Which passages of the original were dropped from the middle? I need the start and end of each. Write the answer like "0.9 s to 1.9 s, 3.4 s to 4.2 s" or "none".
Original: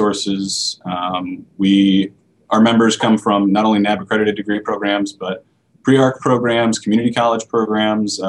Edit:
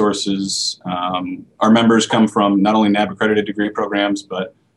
1.5 s to 2.4 s